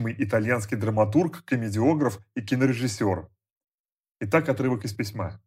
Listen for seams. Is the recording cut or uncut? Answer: uncut